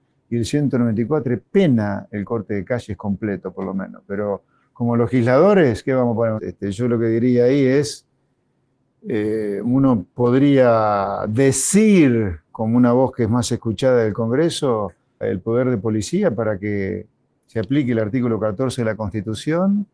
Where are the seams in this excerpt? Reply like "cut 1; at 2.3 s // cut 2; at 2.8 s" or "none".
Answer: cut 1; at 6.4 s // cut 2; at 15.2 s